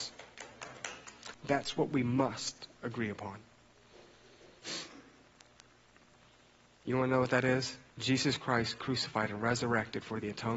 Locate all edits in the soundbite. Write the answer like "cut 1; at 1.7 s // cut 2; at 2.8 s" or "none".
cut 1; at 1.3 s // cut 2; at 6.8 s // cut 3; at 7.9 s